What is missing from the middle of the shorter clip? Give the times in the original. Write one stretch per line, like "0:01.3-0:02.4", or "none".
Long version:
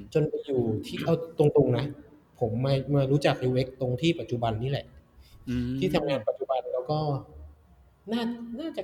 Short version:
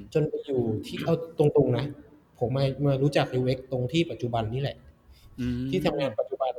0:02.5-0:02.6